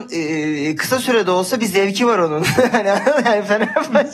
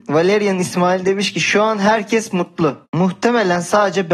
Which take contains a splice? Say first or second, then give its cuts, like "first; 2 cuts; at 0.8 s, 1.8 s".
second; 1 cut; at 2.8 s